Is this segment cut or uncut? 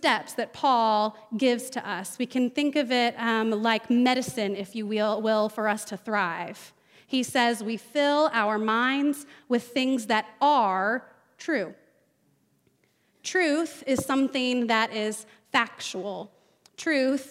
uncut